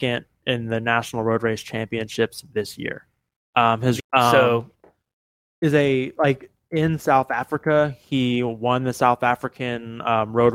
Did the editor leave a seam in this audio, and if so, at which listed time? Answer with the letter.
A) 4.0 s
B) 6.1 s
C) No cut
A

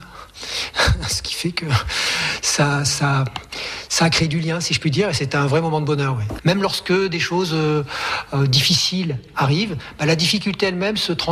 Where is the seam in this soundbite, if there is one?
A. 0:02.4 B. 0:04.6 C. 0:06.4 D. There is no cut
C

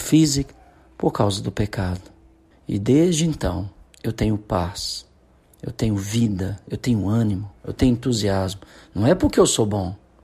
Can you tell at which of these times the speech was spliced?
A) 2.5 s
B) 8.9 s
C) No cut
A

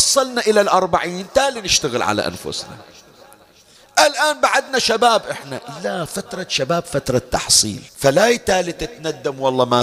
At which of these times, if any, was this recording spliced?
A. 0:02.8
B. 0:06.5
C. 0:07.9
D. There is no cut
C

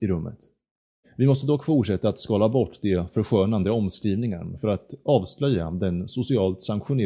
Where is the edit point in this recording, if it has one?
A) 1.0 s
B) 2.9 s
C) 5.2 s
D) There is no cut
A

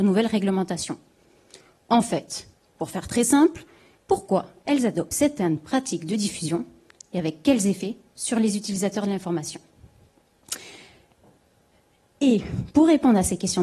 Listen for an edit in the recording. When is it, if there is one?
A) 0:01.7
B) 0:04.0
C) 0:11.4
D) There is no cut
B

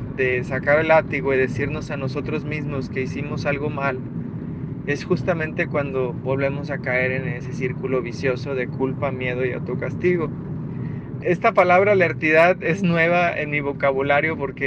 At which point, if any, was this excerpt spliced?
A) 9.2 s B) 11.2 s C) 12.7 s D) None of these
B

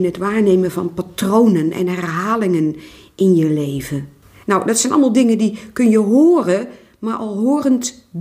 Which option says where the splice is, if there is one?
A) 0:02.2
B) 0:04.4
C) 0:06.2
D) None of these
B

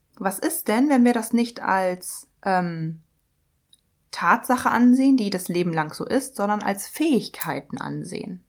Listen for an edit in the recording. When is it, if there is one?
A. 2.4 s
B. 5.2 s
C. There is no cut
A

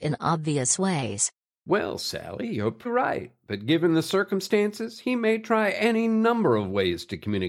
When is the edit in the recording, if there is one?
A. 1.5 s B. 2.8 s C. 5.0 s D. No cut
B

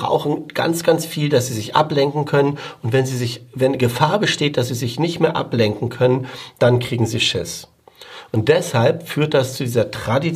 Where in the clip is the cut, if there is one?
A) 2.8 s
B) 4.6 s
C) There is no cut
C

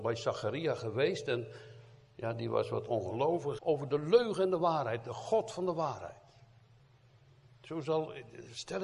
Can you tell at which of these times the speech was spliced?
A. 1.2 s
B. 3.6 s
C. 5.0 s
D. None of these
B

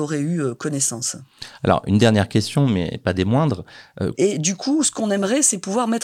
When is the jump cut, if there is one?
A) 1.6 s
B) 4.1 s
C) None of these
B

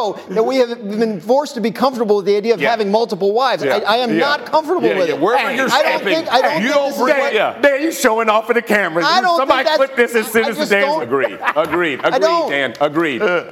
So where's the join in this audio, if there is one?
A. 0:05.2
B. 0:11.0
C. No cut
B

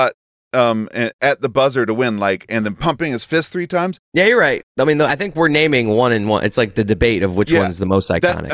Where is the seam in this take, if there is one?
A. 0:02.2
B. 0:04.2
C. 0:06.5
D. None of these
D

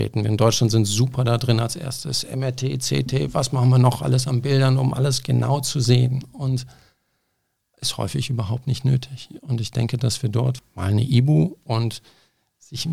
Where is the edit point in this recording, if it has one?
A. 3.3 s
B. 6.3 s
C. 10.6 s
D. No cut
C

